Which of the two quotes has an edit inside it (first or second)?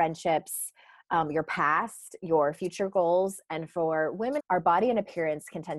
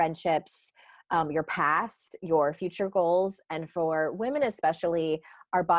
first